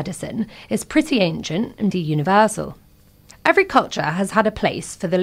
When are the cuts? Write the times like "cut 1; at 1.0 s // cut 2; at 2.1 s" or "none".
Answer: cut 1; at 1.9 s

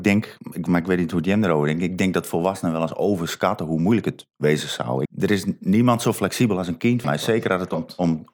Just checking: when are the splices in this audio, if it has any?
cut 1; at 5.1 s // cut 2; at 7.0 s

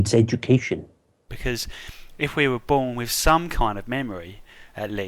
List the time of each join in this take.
cut 1; at 1.3 s

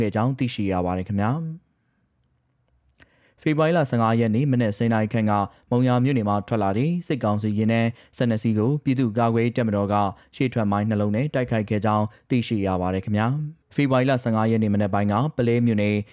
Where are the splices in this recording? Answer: cut 1; at 13.6 s

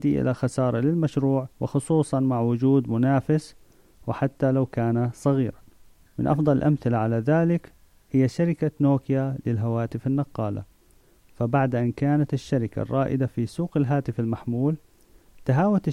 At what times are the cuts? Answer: cut 1; at 1.5 s

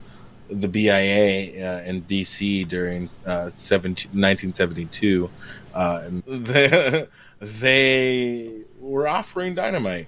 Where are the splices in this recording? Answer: cut 1; at 6.2 s

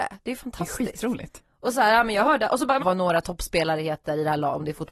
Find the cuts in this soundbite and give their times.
cut 1; at 1.4 s // cut 2; at 2.8 s

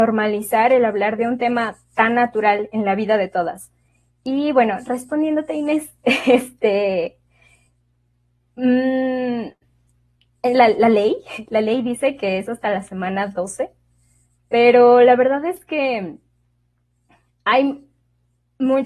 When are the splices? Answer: none

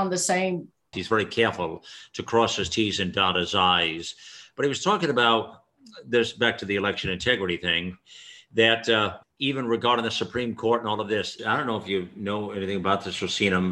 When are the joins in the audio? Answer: cut 1; at 0.9 s // cut 2; at 9.2 s // cut 3; at 11.4 s

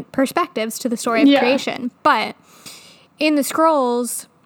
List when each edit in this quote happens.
cut 1; at 2.0 s

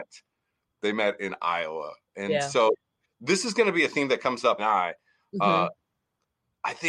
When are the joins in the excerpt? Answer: cut 1; at 3.0 s // cut 2; at 4.6 s

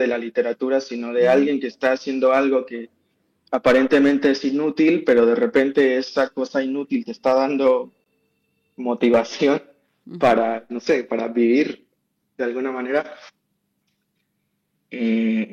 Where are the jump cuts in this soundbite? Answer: none

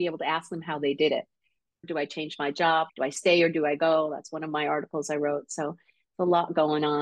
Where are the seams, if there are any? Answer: cut 1; at 1.8 s // cut 2; at 2.9 s

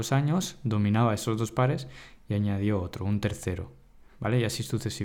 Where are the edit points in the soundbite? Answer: cut 1; at 4.1 s

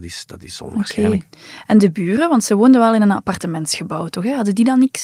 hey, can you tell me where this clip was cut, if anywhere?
none

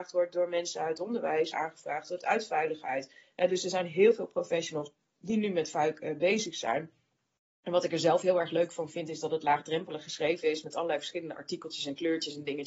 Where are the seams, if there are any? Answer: cut 1; at 1.5 s

